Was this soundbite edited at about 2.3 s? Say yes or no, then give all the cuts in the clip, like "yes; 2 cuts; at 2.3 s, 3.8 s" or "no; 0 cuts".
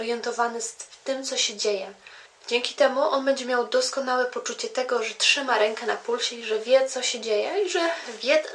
yes; 1 cut; at 2.3 s